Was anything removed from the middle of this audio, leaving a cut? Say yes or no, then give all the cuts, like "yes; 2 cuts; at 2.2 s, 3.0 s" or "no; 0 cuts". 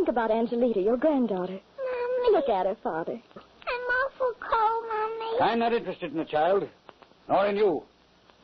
yes; 1 cut; at 3.4 s